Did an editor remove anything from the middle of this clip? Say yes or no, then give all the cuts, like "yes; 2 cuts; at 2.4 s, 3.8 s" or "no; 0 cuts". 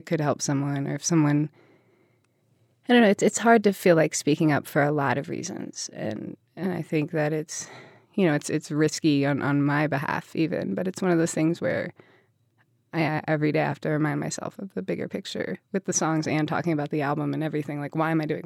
no; 0 cuts